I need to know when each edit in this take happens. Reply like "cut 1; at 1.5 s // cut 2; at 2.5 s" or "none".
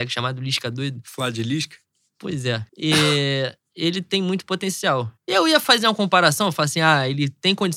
cut 1; at 2.7 s // cut 2; at 5.2 s